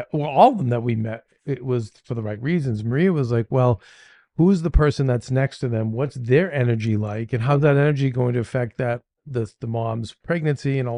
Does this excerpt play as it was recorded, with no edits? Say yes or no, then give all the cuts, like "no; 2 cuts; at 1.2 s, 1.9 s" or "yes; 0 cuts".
yes; 0 cuts